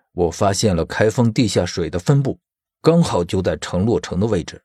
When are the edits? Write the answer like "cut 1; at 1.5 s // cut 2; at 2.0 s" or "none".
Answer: none